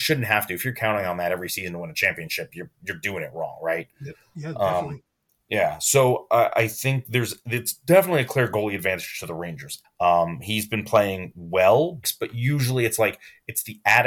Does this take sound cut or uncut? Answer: cut